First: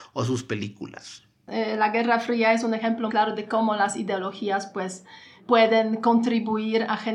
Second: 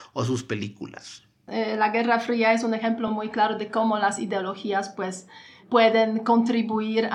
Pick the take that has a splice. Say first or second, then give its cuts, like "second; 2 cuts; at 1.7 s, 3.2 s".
first; 1 cut; at 3.1 s